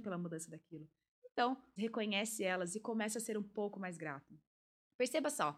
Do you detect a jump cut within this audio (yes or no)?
yes